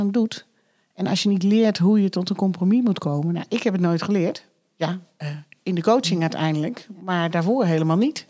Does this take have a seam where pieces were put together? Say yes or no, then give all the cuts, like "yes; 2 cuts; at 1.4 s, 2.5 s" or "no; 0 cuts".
no; 0 cuts